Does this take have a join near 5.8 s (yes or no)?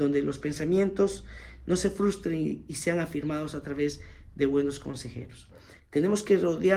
yes